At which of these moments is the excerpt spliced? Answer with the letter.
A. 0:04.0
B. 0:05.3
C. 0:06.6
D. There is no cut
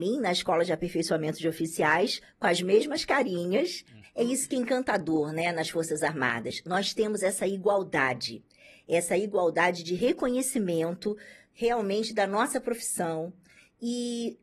A